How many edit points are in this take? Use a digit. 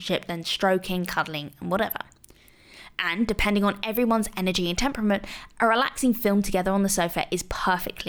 0